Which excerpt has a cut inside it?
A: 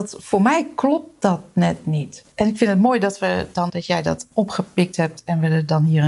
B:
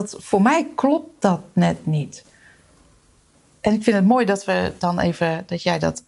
A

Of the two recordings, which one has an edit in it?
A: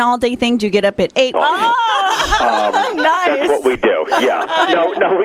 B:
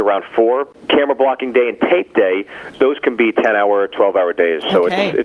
A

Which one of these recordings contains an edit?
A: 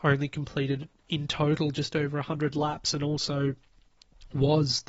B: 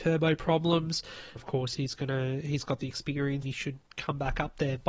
B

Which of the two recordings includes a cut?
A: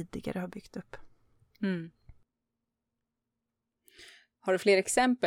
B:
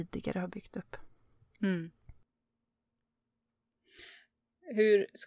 A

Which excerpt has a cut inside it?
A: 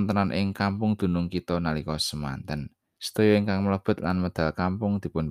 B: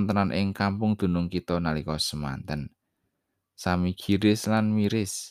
A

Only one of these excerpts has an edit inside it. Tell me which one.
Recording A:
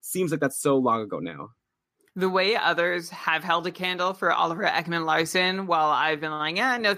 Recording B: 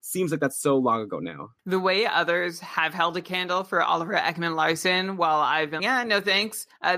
B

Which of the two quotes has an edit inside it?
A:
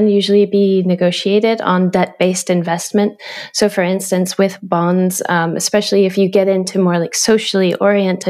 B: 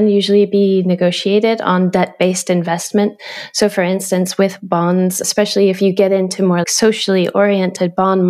B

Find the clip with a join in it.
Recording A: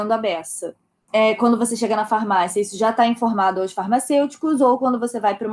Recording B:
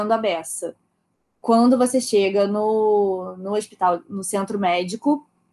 A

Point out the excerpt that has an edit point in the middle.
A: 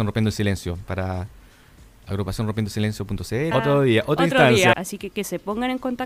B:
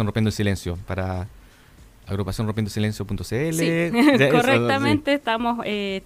A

